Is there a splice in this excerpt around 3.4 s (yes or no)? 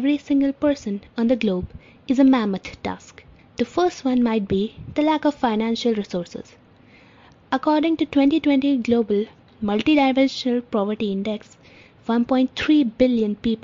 yes